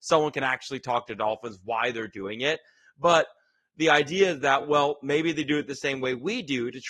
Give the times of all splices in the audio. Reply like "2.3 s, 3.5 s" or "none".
none